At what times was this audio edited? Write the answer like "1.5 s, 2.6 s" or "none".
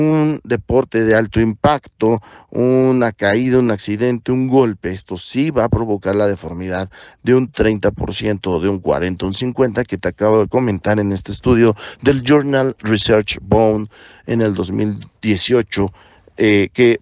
none